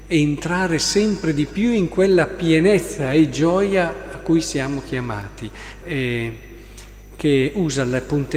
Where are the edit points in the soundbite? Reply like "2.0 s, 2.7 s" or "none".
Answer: 5.8 s